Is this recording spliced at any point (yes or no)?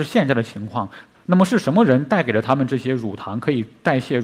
yes